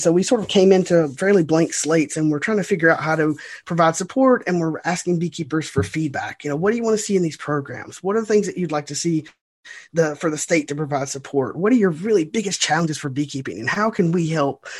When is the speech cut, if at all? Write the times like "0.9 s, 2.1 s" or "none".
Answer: none

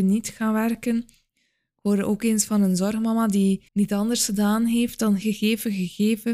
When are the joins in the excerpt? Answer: 1.3 s, 3.7 s, 5.2 s

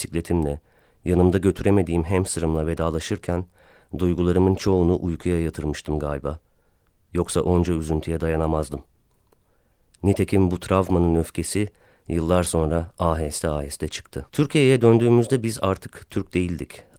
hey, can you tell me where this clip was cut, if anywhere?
14.3 s

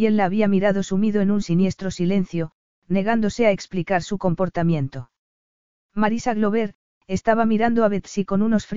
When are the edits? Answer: 6.9 s

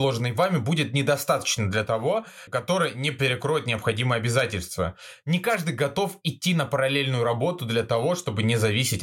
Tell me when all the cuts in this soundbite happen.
2.5 s

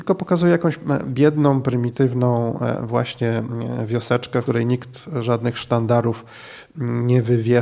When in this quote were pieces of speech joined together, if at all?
4.5 s

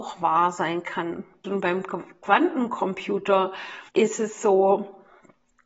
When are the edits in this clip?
1.4 s, 3.9 s

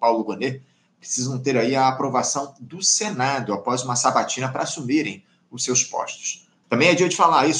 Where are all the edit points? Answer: 6.6 s

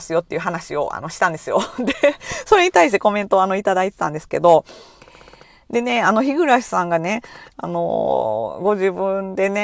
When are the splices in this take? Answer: none

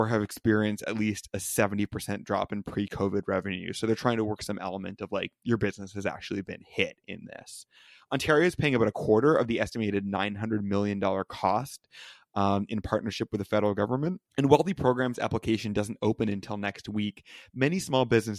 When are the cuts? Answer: 14.3 s

